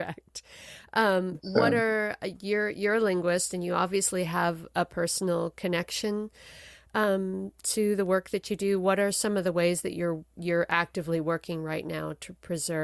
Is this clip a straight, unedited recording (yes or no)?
yes